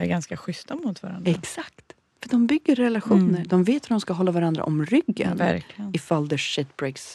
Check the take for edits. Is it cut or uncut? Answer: uncut